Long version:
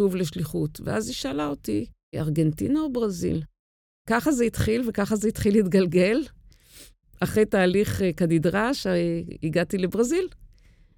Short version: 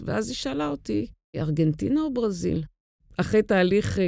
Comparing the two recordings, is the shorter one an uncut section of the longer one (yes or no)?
no